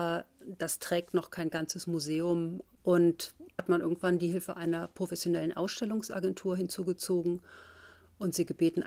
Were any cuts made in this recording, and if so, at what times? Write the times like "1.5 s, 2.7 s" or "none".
3.6 s